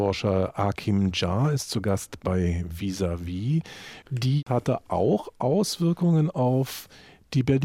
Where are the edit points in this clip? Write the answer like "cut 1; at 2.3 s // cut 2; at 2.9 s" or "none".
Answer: cut 1; at 4.0 s